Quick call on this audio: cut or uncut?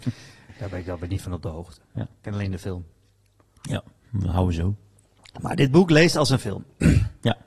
uncut